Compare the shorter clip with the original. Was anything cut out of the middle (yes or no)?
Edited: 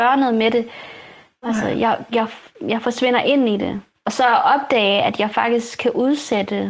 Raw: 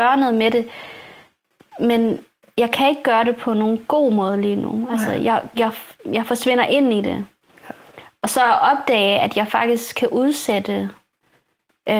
yes